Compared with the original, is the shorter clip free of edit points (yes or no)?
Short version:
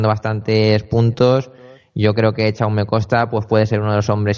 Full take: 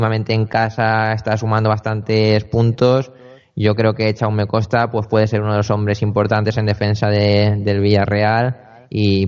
yes